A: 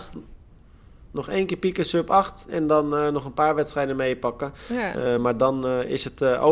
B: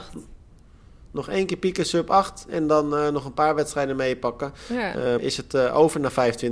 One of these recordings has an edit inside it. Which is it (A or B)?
B